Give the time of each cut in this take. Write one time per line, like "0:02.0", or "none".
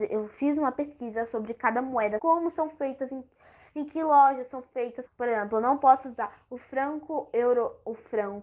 0:02.2
0:05.1